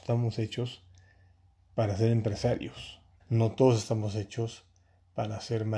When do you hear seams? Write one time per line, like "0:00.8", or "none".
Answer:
0:03.2